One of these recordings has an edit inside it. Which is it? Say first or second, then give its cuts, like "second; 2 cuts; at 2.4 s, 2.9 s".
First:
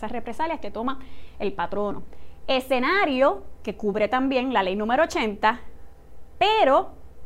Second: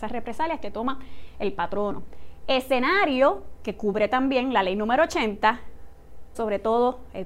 second; 1 cut; at 6.3 s